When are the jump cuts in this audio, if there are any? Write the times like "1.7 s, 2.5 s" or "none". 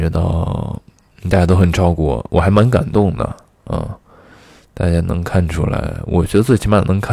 1.1 s